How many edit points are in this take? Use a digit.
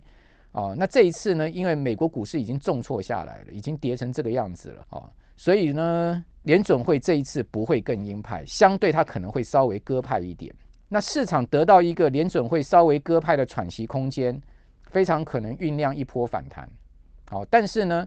2